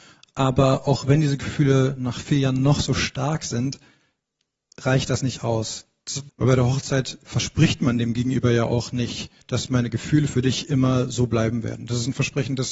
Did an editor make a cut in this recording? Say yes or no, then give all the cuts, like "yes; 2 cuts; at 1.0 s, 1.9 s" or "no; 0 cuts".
yes; 2 cuts; at 6.3 s, 9.4 s